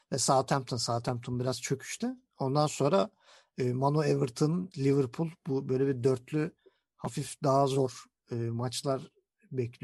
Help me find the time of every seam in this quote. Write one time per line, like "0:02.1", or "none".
0:04.7